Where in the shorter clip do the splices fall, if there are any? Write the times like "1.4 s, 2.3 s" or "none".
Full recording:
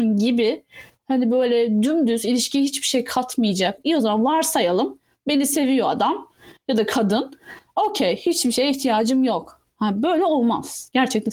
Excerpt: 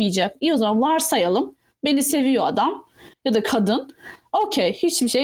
none